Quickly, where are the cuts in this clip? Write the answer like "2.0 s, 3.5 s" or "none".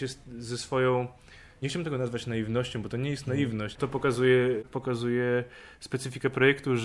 3.7 s